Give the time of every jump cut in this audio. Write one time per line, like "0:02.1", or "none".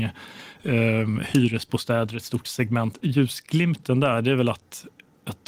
0:03.0